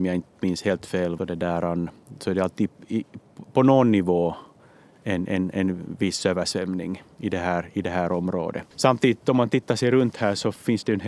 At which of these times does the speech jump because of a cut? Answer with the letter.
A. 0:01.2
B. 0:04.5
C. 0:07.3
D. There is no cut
A